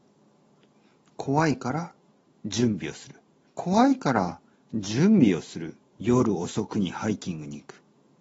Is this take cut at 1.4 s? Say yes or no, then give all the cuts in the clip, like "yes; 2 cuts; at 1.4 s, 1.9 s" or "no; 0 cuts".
no; 2 cuts; at 3.5 s, 5.9 s